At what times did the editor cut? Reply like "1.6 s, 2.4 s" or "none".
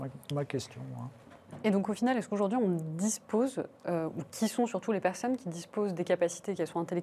none